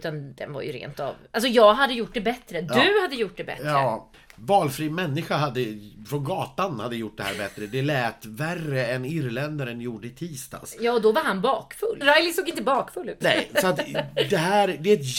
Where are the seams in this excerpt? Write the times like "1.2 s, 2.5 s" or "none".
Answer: 12.0 s